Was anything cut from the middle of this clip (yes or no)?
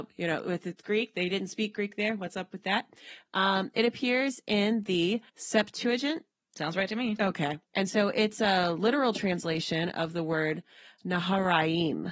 yes